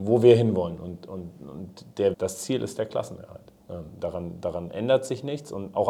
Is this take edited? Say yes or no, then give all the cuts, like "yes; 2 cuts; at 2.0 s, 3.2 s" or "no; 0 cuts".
yes; 1 cut; at 2.1 s